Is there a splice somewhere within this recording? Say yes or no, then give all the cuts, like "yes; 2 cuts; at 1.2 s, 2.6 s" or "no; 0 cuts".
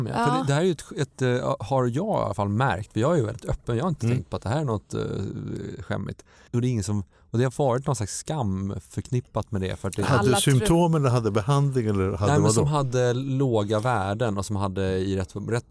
yes; 1 cut; at 6.5 s